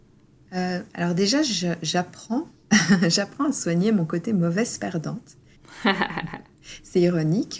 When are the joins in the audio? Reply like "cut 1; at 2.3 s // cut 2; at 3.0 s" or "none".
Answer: none